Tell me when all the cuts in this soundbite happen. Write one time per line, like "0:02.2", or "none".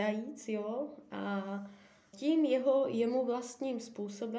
0:02.1